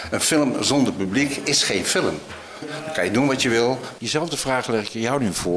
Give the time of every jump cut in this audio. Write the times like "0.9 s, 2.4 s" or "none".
2.6 s, 4.0 s